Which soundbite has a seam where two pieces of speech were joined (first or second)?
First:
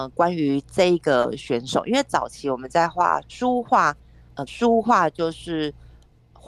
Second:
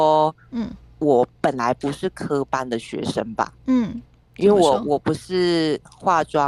first